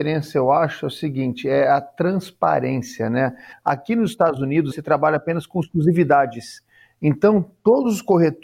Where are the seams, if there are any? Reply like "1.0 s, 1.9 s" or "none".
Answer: 3.5 s, 4.7 s